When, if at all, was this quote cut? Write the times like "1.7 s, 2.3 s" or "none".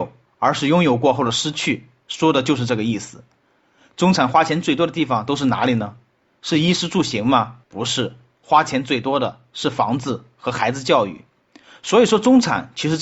7.6 s